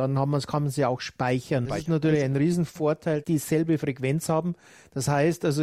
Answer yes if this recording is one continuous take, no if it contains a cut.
no